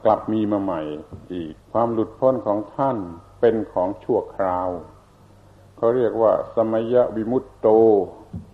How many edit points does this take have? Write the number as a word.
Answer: one